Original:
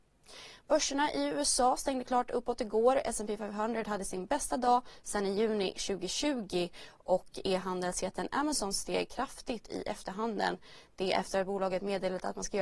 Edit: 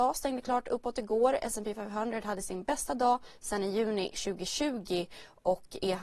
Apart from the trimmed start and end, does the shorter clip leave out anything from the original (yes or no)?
no